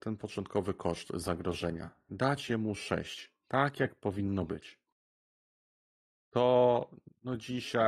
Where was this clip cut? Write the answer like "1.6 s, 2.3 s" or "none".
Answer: 6.1 s

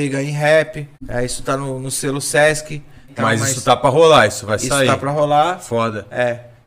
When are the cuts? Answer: 0.9 s, 3.1 s

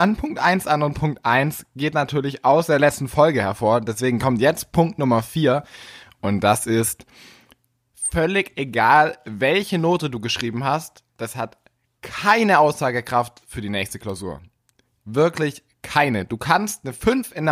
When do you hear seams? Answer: none

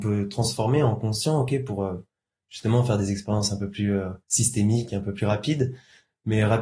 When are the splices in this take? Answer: 4.2 s

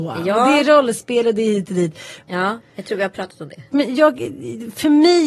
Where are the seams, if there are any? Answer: 2.3 s, 3.7 s

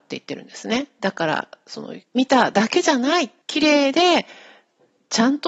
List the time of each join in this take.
2.0 s, 3.4 s

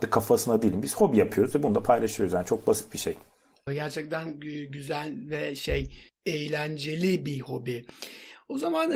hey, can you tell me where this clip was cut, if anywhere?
3.7 s

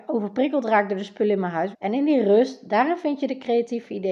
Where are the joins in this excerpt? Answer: 1.7 s

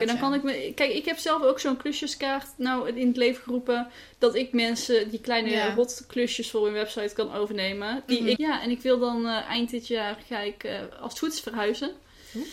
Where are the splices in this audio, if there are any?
8.4 s

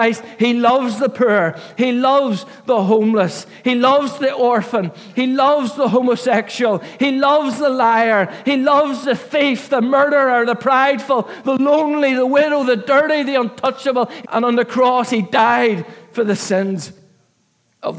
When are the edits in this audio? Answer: 5.1 s, 14.2 s

